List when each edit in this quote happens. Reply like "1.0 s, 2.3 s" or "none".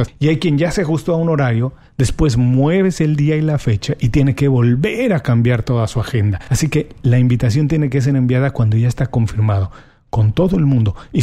none